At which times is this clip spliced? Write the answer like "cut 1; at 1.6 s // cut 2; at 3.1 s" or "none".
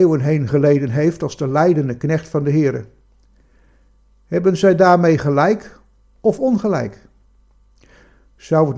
none

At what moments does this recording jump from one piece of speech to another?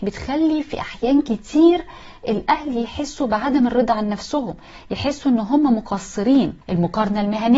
cut 1; at 6.6 s

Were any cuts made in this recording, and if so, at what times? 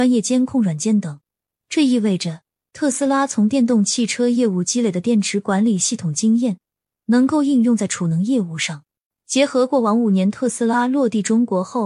cut 1; at 1.5 s // cut 2; at 9.1 s

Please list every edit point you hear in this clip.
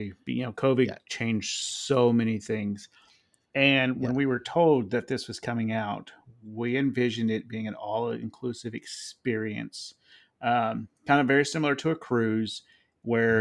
none

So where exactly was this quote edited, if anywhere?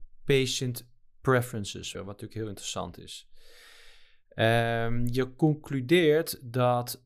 cut 1; at 1.9 s

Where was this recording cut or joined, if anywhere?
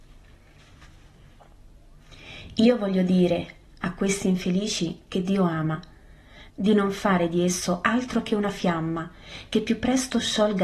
cut 1; at 6.5 s

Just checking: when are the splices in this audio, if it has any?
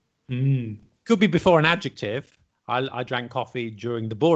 none

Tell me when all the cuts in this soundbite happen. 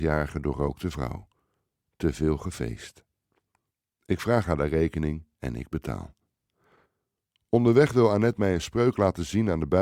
none

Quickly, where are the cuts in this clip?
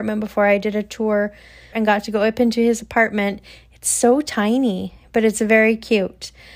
cut 1; at 1.7 s

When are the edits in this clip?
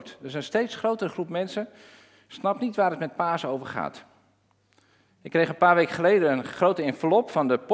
none

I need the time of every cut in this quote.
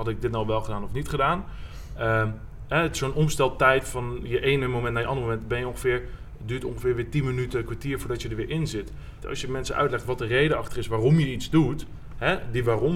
cut 1; at 9.2 s

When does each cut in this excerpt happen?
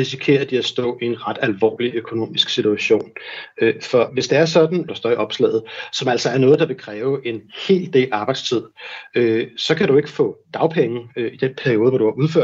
cut 1; at 4.9 s

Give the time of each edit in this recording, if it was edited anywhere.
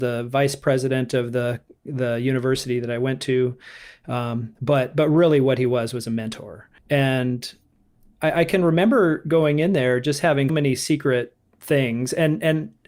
cut 1; at 6.8 s // cut 2; at 10.5 s

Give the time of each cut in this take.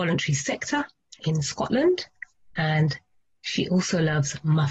cut 1; at 1.2 s

